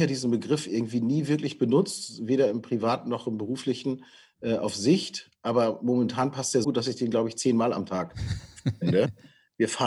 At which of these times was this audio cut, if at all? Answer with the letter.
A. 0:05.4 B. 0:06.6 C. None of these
B